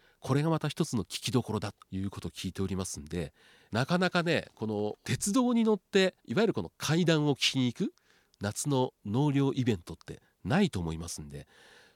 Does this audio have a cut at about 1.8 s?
yes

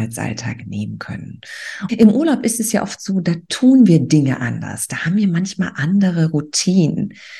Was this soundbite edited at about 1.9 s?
yes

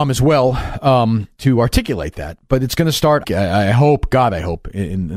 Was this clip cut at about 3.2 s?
yes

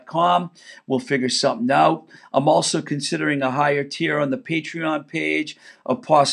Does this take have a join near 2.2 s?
no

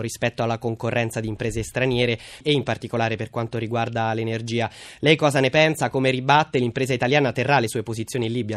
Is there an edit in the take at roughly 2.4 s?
yes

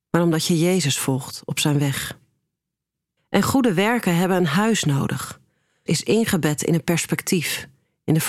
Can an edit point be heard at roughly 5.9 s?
yes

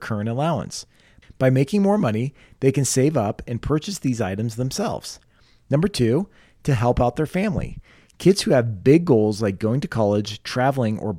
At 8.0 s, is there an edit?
yes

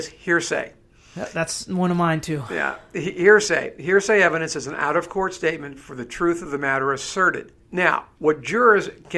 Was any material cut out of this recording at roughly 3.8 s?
no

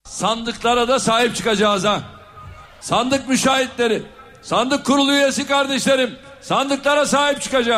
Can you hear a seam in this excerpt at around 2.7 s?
no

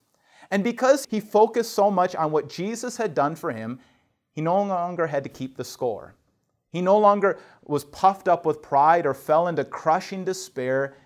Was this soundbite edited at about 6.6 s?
no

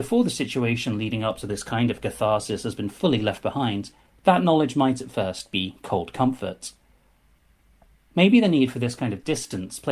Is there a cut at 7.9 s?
no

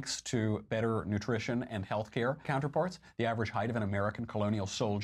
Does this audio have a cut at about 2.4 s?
yes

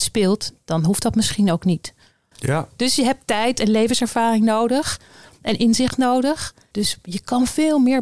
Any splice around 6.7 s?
yes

